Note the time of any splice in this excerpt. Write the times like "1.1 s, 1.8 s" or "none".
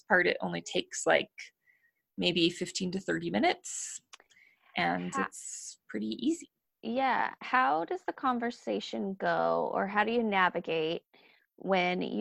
none